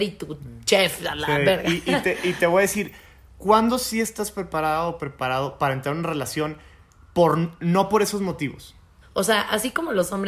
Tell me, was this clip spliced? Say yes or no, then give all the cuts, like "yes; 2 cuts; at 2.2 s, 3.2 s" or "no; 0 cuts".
yes; 1 cut; at 9.0 s